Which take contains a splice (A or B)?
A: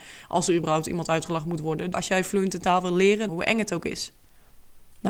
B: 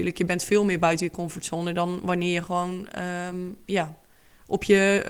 A